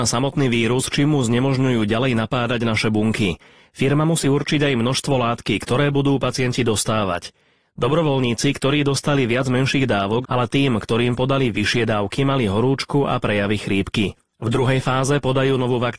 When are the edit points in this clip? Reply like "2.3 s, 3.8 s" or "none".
10.2 s